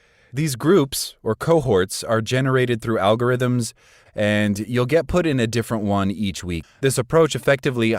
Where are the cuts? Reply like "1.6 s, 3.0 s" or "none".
4.1 s, 6.6 s